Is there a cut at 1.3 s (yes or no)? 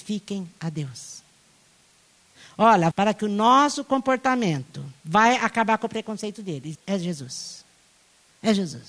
no